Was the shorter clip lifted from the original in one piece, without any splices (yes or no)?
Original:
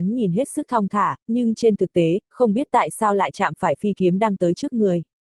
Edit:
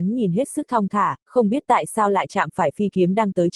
no